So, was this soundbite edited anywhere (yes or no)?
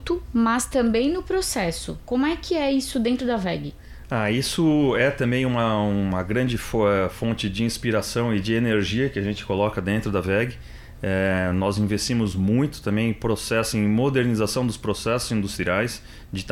no